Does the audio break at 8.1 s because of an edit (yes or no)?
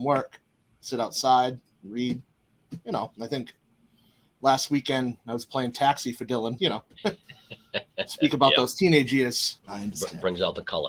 no